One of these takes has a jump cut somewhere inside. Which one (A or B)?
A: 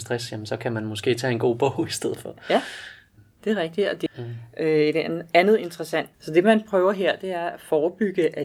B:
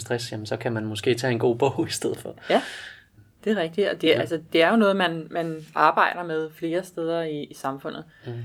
A